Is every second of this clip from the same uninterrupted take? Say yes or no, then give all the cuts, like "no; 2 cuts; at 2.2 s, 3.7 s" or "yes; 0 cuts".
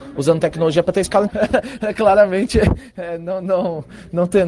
no; 2 cuts; at 1.3 s, 3.4 s